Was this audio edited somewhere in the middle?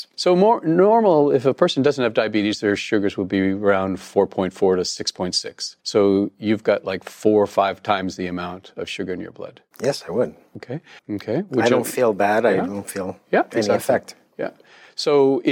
yes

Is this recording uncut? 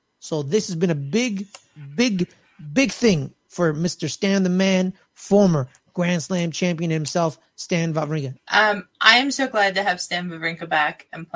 no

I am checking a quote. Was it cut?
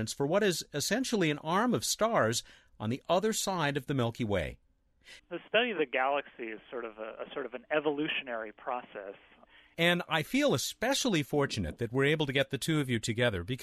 yes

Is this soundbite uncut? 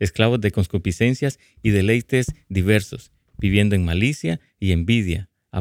yes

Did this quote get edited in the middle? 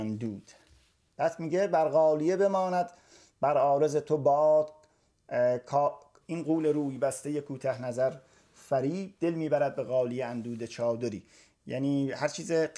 yes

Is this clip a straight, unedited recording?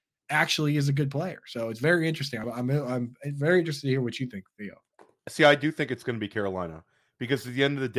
yes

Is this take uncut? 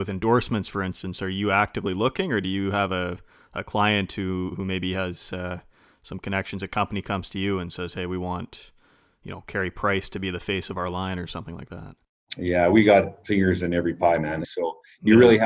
no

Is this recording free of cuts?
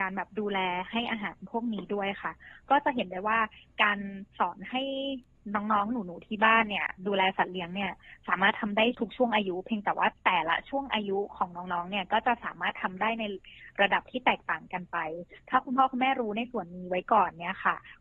no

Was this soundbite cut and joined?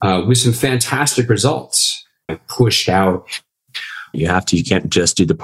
yes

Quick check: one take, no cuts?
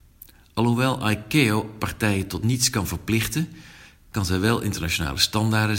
yes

